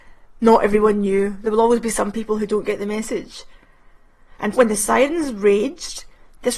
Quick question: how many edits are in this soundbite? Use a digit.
1